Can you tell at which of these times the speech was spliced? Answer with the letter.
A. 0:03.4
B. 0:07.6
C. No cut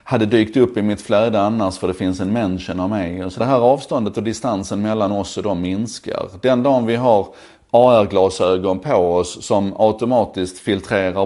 A